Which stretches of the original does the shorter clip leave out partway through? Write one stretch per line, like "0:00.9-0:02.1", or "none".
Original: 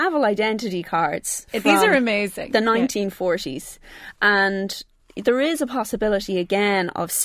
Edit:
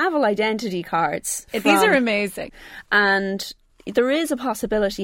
0:02.5-0:03.8